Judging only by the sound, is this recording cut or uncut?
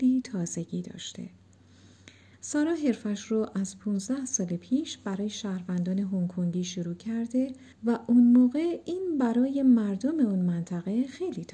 cut